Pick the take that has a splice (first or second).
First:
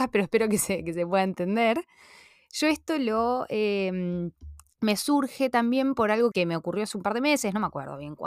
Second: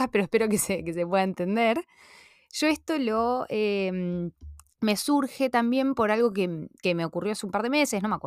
first